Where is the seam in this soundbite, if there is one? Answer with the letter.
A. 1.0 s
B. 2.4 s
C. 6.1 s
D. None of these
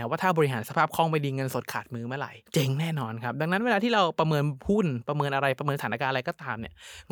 B